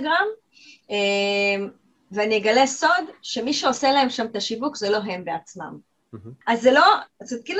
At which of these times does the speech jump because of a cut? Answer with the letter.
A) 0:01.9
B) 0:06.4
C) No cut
B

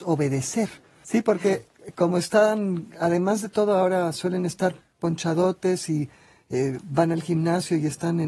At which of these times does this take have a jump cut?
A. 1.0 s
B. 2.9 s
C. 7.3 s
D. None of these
A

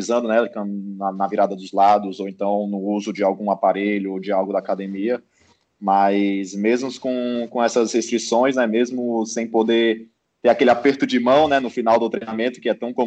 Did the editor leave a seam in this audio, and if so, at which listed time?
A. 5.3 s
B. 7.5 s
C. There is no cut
C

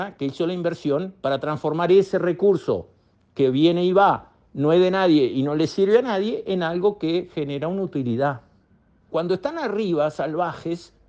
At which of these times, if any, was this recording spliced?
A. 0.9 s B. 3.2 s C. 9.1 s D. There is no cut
C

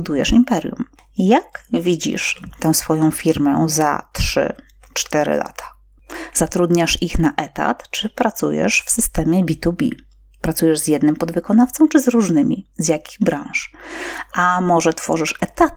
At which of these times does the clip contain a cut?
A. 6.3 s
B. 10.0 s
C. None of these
A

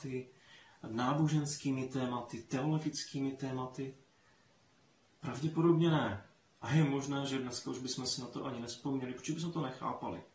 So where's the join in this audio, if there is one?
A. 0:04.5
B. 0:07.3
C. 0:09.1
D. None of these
D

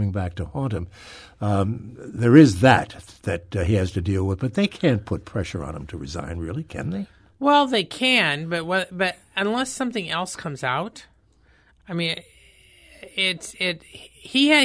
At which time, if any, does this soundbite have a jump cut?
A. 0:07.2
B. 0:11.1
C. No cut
C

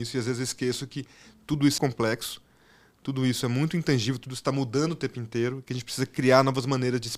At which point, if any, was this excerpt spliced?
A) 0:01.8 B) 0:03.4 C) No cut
A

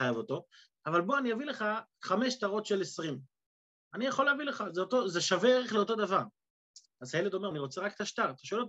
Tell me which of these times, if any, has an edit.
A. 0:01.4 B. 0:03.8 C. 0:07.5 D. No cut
C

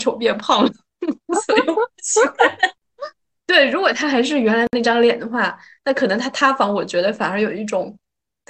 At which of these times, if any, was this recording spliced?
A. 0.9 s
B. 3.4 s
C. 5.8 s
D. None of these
B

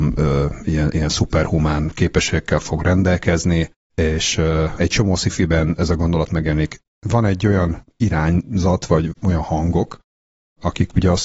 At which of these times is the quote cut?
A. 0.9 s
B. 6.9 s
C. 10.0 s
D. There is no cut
B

